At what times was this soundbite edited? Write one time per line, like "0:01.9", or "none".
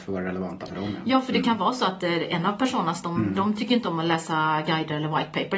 none

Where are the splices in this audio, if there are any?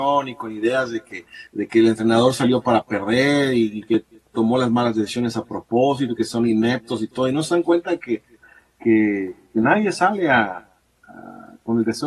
0:01.5

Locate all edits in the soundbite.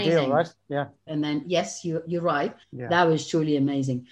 0:01.1
0:02.6

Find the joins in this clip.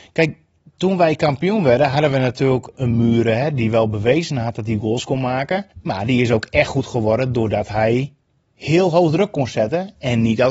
0:02.7
0:05.7

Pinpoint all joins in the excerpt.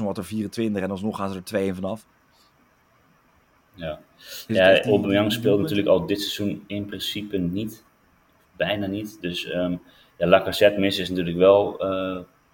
none

